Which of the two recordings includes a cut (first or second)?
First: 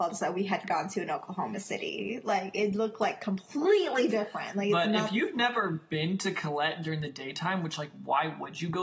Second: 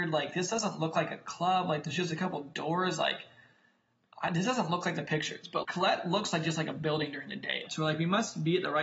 second